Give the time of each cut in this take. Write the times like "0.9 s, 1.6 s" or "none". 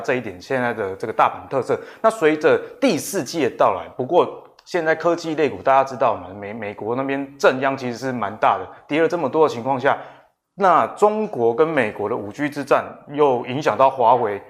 none